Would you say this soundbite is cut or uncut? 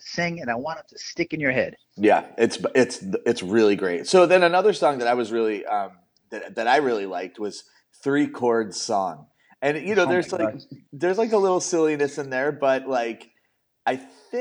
uncut